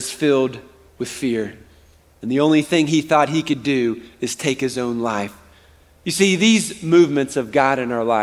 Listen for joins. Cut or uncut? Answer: uncut